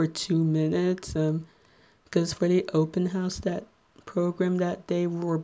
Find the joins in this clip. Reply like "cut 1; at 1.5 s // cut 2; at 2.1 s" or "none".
none